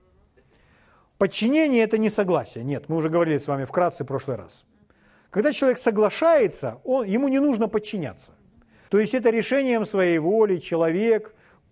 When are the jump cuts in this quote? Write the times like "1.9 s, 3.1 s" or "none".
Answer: 8.9 s